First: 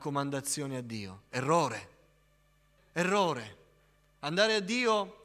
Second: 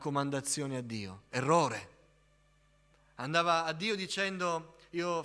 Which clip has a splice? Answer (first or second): first